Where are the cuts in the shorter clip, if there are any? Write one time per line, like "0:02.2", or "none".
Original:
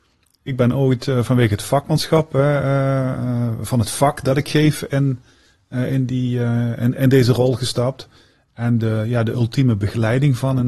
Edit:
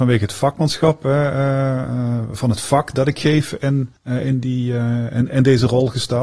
0:04.0

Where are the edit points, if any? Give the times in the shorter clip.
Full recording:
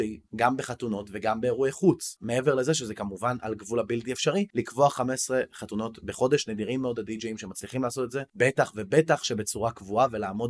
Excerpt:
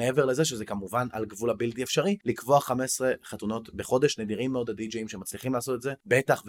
none

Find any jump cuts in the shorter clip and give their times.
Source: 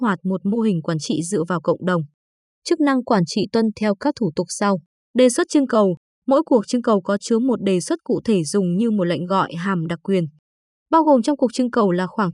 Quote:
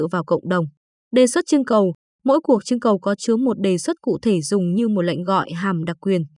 0:01.0

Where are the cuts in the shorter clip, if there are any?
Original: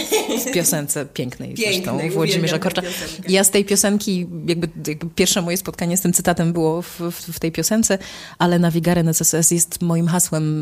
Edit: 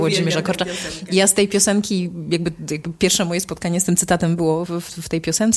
0:04.7

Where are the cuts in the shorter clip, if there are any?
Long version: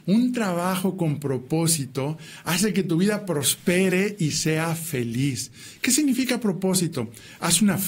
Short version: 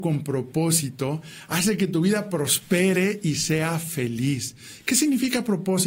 none

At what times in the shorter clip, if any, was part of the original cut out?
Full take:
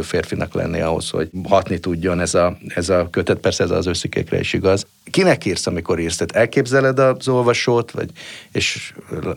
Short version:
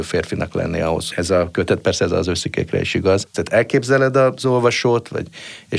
0:01.1
0:03.3

